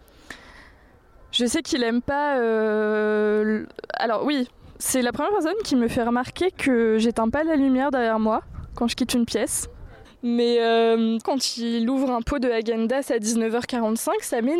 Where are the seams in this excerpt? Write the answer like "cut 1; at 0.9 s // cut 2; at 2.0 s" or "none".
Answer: cut 1; at 10.0 s // cut 2; at 11.2 s